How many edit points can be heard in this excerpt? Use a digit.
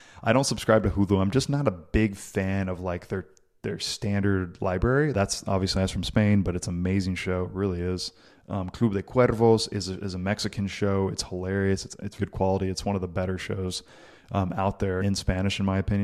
3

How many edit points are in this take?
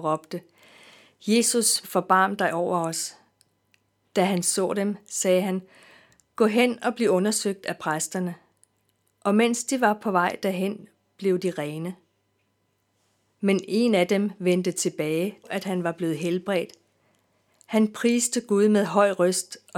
2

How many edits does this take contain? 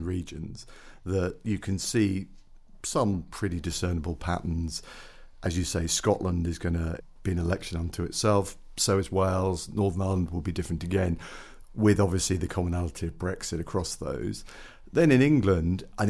0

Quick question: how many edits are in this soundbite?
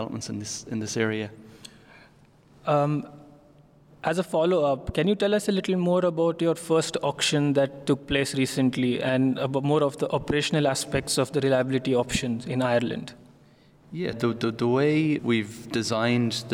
2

